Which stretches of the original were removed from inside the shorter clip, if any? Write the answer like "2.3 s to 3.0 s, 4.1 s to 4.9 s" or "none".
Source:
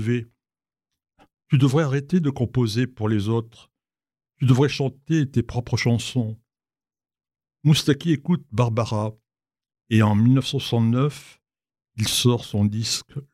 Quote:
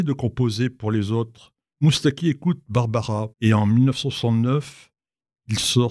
3.9 s to 7.6 s, 9.2 s to 9.8 s